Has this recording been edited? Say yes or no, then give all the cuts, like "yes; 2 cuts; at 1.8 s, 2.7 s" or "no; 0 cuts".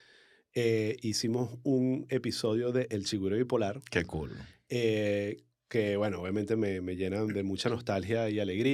no; 0 cuts